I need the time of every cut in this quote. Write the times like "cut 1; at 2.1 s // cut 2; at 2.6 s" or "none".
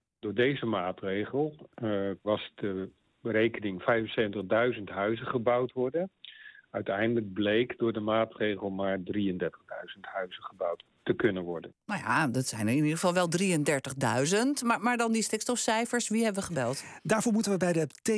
cut 1; at 2.2 s